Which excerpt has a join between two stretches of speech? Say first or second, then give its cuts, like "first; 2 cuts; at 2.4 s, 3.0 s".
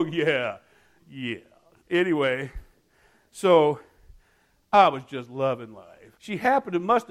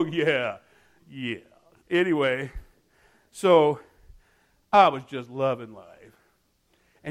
first; 1 cut; at 6.2 s